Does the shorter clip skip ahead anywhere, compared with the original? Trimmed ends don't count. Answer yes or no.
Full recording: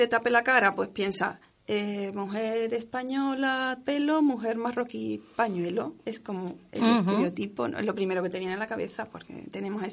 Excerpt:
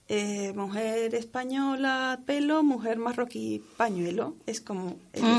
no